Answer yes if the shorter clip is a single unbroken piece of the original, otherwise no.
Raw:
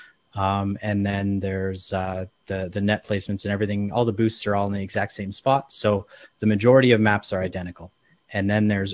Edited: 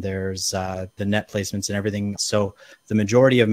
no